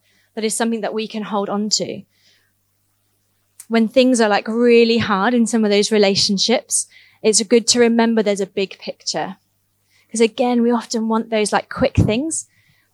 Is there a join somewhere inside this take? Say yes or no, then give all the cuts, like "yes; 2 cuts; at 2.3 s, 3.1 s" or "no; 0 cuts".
no; 0 cuts